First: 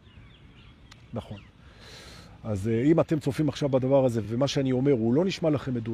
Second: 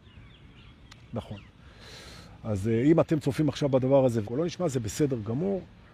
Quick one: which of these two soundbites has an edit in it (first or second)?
second